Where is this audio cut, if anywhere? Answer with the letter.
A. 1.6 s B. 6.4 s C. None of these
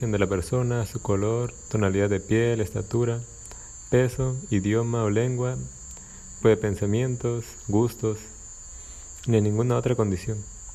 B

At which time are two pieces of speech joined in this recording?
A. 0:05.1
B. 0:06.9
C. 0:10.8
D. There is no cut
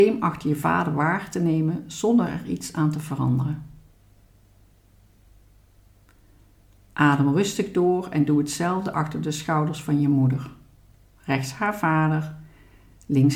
D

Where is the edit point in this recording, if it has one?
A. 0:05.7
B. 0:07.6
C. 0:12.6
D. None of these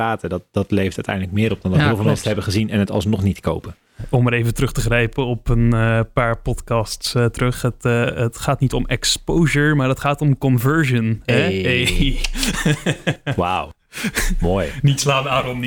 D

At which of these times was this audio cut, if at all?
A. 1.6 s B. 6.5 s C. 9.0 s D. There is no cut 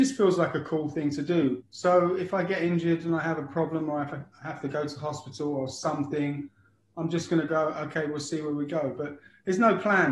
A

